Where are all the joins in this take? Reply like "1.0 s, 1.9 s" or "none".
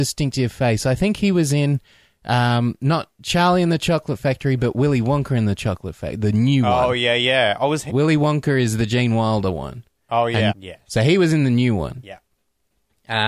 7.9 s, 10.5 s